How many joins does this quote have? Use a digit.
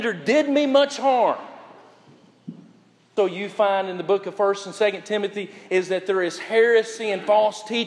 1